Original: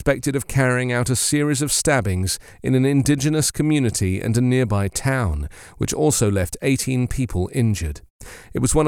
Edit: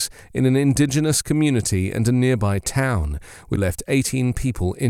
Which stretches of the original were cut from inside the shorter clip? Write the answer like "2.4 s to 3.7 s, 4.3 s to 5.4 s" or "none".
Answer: 5.9 s to 6.3 s